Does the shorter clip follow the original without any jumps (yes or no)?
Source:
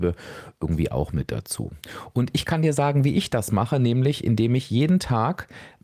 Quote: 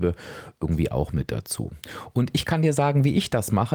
yes